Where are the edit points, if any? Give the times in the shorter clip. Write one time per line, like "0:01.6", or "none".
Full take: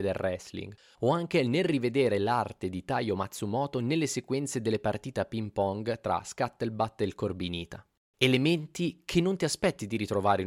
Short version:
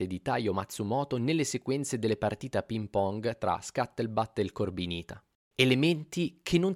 none